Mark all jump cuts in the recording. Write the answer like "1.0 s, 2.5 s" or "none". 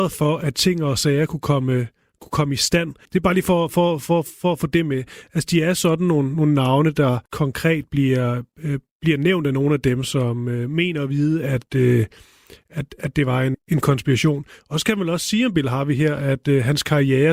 3.1 s, 7.3 s, 13.5 s